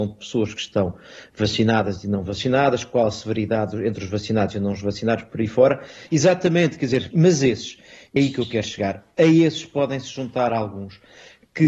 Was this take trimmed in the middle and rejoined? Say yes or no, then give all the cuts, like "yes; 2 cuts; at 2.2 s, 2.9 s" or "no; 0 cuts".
yes; 3 cuts; at 6.1 s, 7.1 s, 8.2 s